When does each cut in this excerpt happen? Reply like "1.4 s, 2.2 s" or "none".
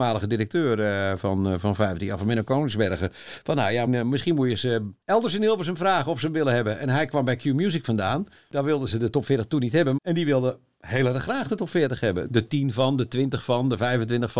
3.9 s, 10.0 s, 12.3 s